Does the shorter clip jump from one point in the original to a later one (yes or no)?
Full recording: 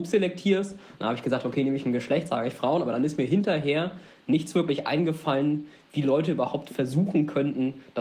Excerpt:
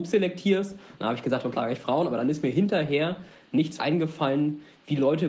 yes